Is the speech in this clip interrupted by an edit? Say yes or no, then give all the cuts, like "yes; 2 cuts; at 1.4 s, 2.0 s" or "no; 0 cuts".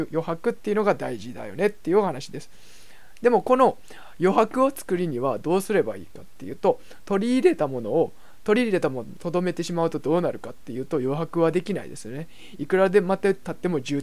no; 0 cuts